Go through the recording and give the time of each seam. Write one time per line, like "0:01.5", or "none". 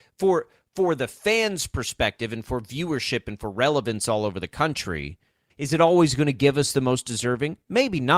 0:05.5

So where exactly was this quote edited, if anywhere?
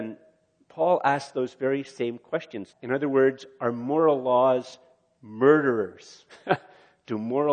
0:02.7

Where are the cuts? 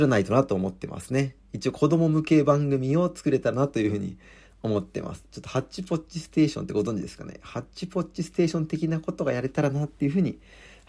none

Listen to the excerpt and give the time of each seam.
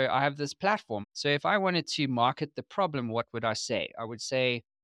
0:01.0

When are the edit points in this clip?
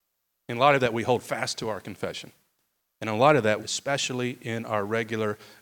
0:03.6

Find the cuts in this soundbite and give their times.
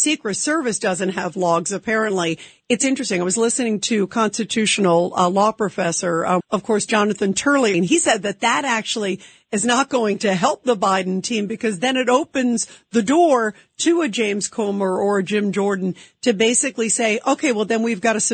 0:06.4
0:07.7

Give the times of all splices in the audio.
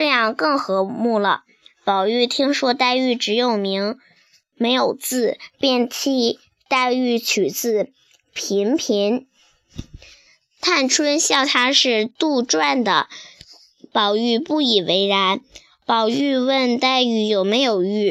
none

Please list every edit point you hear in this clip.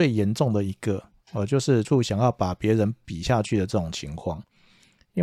0:01.8

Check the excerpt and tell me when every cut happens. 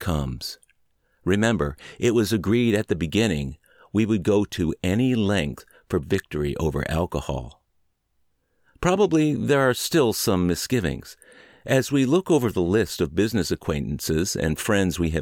none

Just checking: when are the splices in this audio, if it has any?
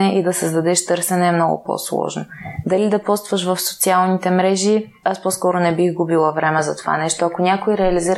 0:05.0

